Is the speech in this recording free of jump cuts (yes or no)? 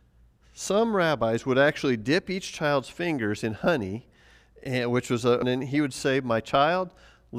no